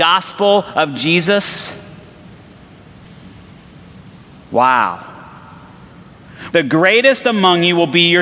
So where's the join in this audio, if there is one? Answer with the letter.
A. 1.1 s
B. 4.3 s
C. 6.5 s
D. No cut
C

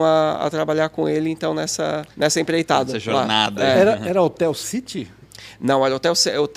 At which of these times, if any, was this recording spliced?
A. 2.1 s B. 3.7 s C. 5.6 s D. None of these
A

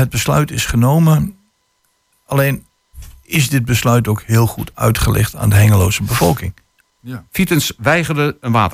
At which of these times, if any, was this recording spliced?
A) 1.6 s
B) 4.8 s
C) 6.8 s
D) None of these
C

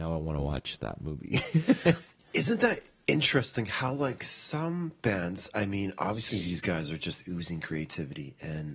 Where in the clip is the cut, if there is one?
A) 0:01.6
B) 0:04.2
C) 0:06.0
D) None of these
D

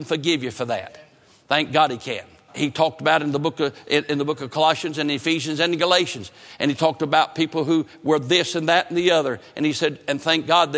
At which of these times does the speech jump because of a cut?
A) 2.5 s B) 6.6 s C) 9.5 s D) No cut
A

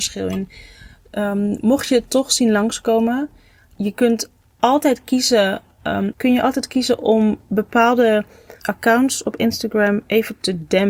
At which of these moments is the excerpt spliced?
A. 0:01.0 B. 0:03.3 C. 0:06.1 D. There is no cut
C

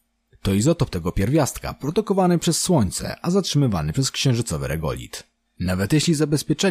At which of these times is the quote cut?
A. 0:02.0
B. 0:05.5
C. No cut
B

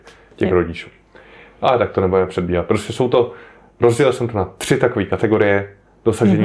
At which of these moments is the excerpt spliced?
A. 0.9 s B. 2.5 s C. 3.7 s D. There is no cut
D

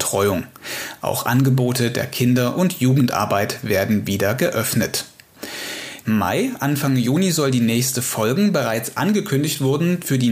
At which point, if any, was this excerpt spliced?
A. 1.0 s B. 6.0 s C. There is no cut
B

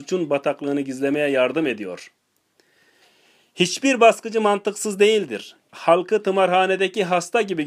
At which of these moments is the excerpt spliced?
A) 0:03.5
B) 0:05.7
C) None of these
B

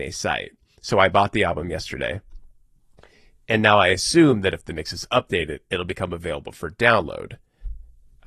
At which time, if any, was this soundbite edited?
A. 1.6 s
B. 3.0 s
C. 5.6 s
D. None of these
D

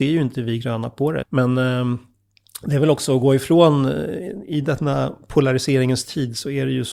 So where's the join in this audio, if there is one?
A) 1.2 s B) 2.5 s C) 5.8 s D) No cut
A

